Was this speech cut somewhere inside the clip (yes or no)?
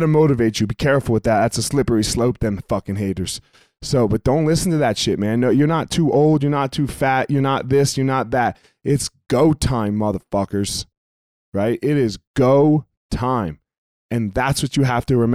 no